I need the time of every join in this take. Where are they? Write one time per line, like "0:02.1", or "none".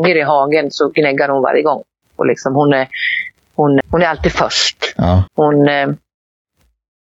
0:02.0
0:03.8
0:05.3